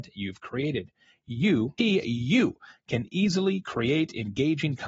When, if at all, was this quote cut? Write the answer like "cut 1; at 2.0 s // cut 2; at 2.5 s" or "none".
cut 1; at 1.8 s